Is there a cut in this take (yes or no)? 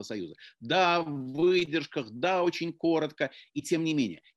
no